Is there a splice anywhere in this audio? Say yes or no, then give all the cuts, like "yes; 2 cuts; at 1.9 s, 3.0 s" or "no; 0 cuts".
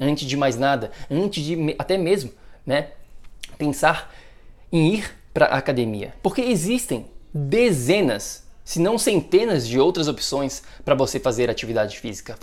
no; 0 cuts